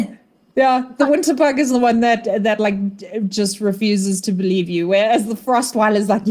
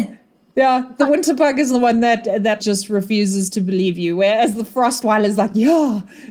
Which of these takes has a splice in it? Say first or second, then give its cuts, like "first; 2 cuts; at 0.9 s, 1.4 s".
second; 1 cut; at 2.6 s